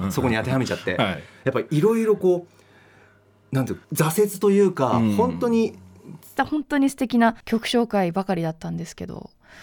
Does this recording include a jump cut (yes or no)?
yes